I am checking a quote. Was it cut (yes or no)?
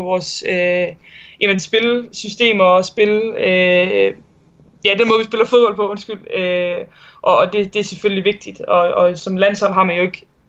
no